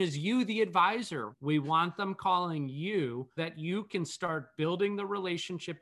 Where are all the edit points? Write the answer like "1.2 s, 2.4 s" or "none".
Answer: 1.3 s, 3.4 s

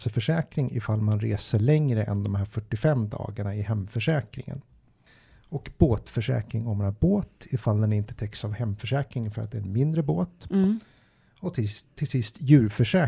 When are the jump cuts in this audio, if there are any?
none

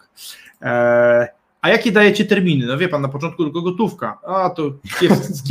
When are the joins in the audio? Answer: none

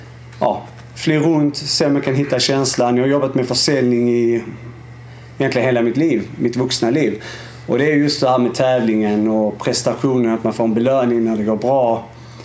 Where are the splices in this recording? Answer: none

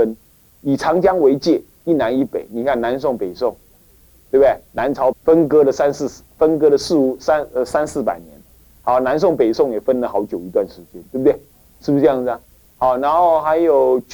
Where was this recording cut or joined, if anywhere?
5.1 s

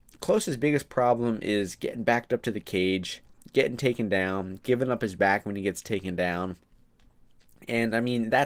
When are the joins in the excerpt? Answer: none

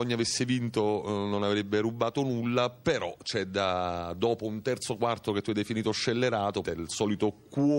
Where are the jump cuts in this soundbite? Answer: 6.6 s

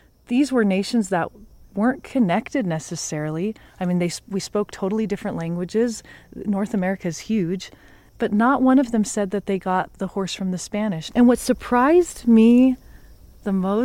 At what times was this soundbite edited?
8.1 s, 11.1 s

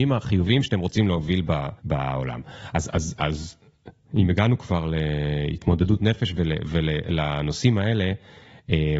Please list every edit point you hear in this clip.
1.8 s

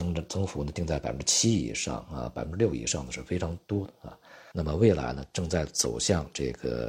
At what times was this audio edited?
4.5 s

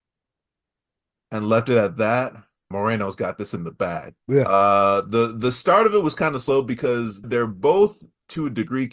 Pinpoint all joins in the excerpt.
2.7 s, 4.2 s, 7.2 s

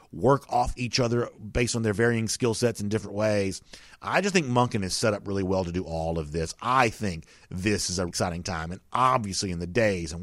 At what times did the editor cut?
8.1 s

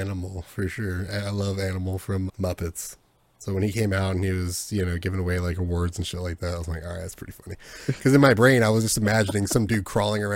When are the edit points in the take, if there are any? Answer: 2.3 s

